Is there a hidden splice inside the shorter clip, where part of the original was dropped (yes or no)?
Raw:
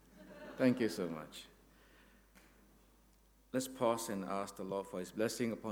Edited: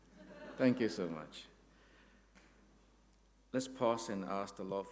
no